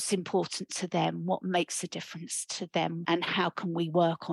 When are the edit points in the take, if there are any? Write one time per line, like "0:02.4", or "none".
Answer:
0:03.0